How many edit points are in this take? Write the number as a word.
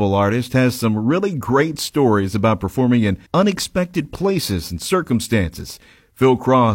one